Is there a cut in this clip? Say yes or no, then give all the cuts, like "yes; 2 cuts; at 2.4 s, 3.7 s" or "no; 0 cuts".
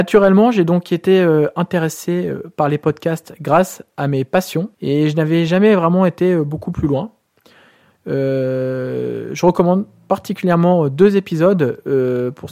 yes; 2 cuts; at 4.7 s, 7.9 s